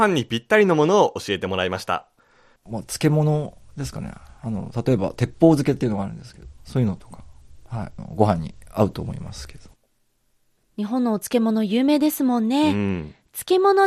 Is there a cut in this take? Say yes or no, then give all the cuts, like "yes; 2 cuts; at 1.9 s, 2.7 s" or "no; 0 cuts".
no; 0 cuts